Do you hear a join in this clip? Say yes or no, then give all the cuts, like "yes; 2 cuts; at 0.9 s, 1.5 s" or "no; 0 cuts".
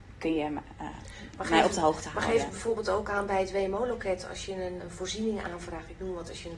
yes; 1 cut; at 4.8 s